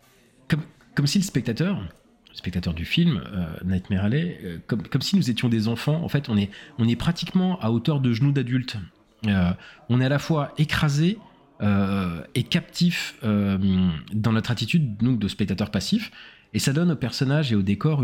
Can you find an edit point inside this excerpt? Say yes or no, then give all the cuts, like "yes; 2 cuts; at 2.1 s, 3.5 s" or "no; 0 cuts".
no; 0 cuts